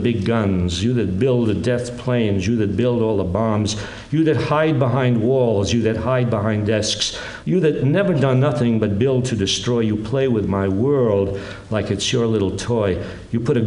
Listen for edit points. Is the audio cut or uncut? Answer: cut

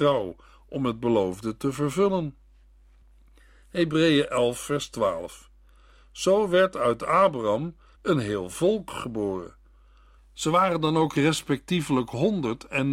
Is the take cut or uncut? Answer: cut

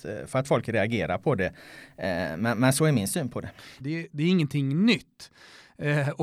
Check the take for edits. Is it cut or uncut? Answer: cut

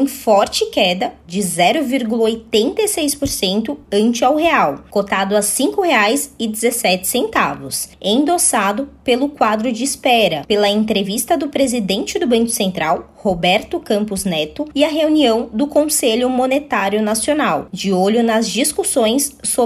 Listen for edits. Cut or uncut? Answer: uncut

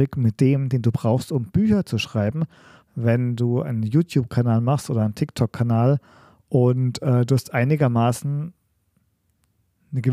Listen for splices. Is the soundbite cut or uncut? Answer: cut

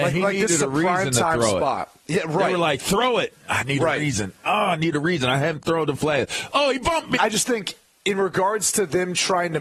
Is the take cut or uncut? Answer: cut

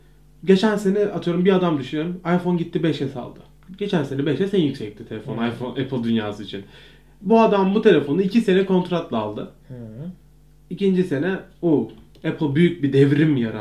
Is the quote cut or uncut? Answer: uncut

